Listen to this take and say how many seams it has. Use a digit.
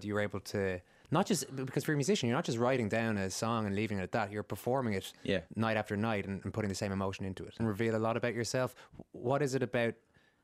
1